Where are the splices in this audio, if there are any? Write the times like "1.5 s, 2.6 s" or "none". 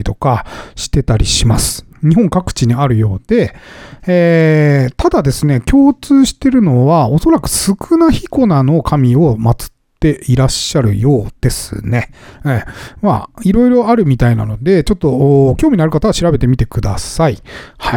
1.9 s